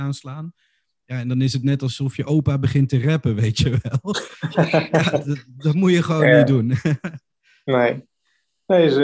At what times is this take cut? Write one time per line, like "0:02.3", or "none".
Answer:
none